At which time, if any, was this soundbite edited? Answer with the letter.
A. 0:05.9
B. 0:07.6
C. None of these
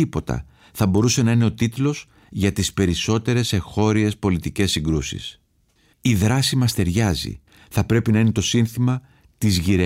A